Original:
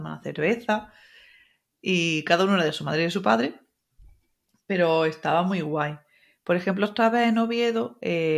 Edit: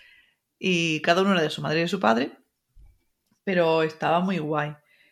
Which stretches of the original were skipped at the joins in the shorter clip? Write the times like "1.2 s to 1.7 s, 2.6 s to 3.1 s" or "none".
none